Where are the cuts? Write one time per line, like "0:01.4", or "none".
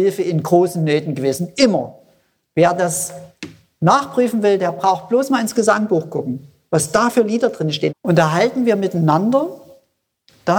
0:07.9